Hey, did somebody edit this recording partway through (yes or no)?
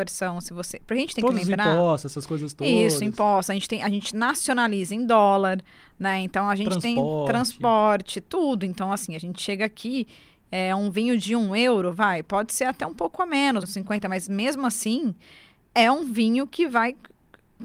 yes